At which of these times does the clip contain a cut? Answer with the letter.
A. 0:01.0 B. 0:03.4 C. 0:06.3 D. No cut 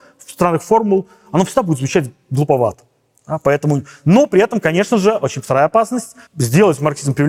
C